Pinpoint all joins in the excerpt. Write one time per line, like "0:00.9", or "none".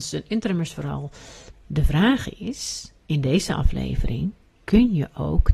0:01.5
0:03.0